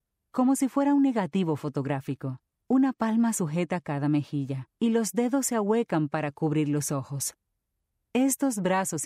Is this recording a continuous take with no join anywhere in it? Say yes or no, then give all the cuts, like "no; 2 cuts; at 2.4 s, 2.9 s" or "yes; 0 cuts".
no; 3 cuts; at 2.6 s, 4.7 s, 7.9 s